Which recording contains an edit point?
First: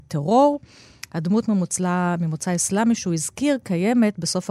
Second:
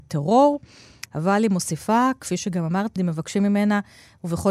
second; 2 cuts; at 1.1 s, 3.0 s

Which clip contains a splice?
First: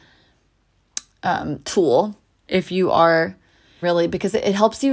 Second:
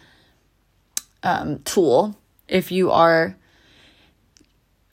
first; 1 cut; at 3.8 s

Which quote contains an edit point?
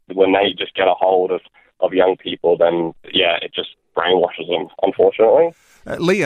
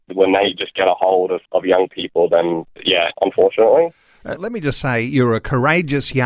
second; 3 cuts; at 1.4 s, 3.1 s, 4.4 s

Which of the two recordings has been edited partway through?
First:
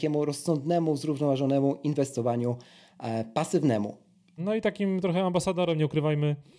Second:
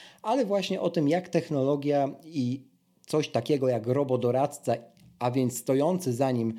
first; 1 cut; at 4.4 s

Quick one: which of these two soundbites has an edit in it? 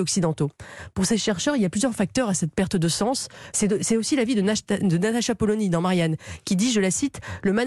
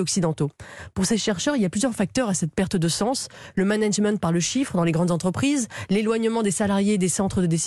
first; 1 cut; at 3.5 s

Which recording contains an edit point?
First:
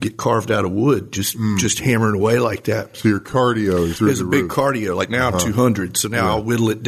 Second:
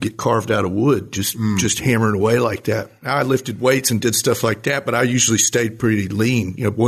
first; 2 cuts; at 2.9 s, 3.9 s

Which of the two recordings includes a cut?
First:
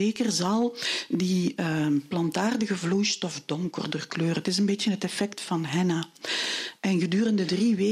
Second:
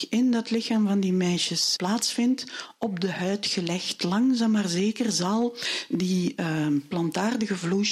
second; 1 cut; at 1.8 s

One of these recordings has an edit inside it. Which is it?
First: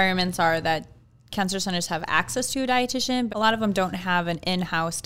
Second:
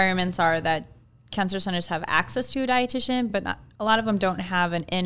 first; 1 cut; at 3.3 s

